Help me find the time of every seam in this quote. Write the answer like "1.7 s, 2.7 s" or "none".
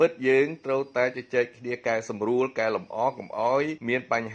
none